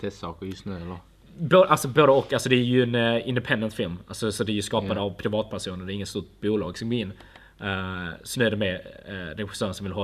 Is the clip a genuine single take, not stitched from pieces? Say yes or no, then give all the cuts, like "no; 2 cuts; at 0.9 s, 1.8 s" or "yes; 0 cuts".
no; 1 cut; at 8.3 s